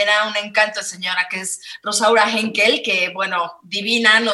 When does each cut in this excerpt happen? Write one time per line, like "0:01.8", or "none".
none

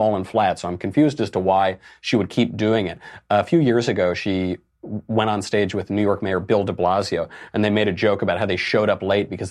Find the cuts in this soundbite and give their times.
none

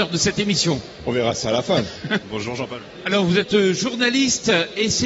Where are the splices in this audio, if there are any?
0:02.2

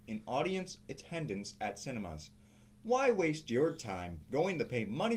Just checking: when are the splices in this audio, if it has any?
none

